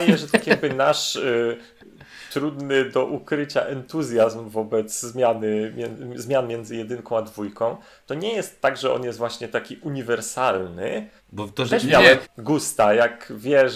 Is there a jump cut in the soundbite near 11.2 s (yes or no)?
yes